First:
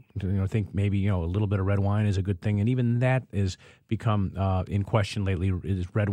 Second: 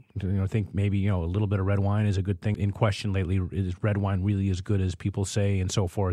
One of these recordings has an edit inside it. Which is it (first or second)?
second